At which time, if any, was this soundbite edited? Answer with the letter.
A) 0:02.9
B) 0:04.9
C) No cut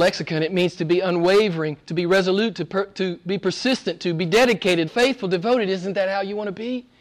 B